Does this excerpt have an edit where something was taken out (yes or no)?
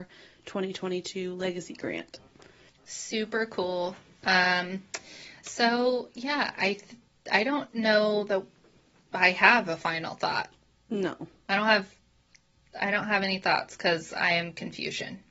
yes